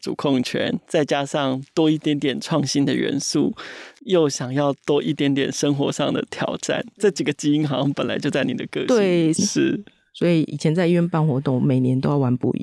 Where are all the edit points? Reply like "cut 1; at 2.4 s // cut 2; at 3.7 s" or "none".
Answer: cut 1; at 9.3 s